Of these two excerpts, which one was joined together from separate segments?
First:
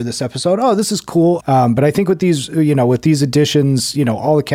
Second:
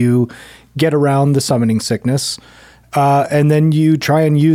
first; 1 cut; at 1.4 s

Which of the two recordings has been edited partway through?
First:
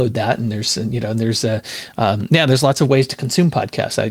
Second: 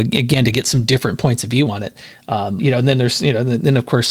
second; 1 cut; at 2.6 s

